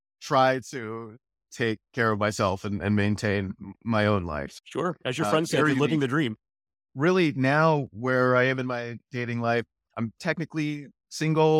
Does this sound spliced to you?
yes; 1 cut; at 6.8 s

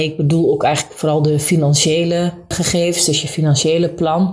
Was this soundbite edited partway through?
yes; 1 cut; at 2.5 s

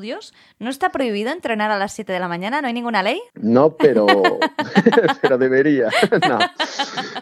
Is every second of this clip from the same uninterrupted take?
no; 1 cut; at 3.3 s

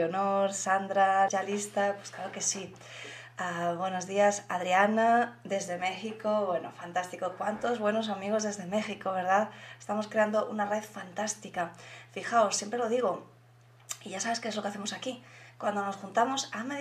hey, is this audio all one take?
no; 1 cut; at 1.3 s

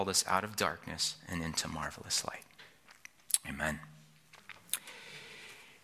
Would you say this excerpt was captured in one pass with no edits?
yes; 0 cuts

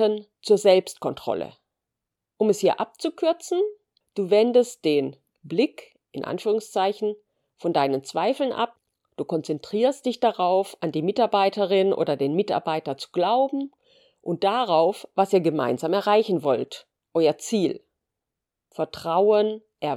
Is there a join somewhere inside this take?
no; 0 cuts

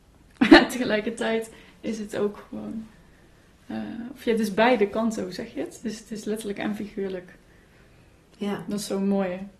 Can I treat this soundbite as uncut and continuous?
yes; 0 cuts

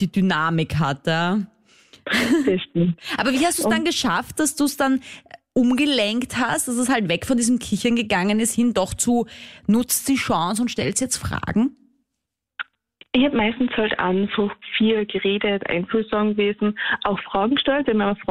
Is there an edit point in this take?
no; 0 cuts

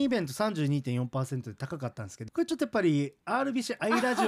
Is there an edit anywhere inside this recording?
yes; 1 cut; at 2.3 s

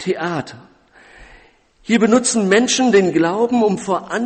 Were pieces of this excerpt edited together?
no; 0 cuts

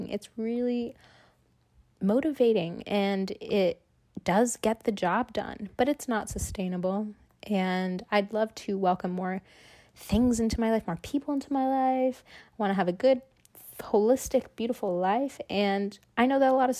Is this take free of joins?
yes; 0 cuts

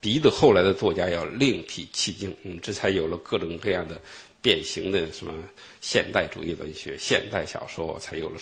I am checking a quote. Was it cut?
no; 0 cuts

